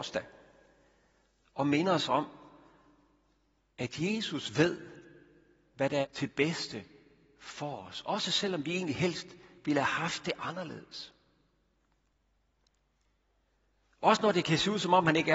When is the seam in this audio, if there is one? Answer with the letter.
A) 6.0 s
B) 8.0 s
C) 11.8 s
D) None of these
A